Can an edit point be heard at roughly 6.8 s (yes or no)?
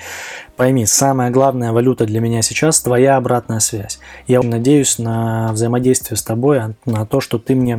no